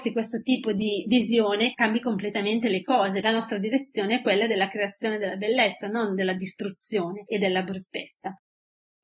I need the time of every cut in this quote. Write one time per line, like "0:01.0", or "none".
0:03.2